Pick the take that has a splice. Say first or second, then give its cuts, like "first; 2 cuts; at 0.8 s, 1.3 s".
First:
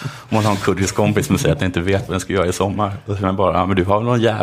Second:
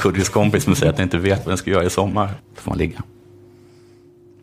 second; 1 cut; at 2.4 s